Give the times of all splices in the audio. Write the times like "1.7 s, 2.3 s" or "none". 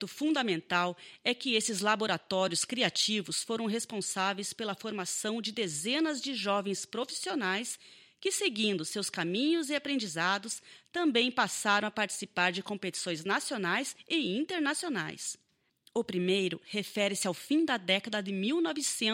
15.7 s